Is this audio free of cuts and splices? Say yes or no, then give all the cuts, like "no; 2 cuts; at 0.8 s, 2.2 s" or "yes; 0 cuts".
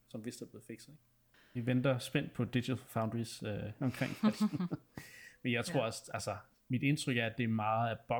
no; 2 cuts; at 1.3 s, 3.8 s